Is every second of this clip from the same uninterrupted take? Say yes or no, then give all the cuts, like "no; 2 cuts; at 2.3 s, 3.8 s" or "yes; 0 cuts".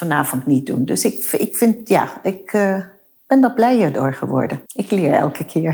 no; 1 cut; at 4.7 s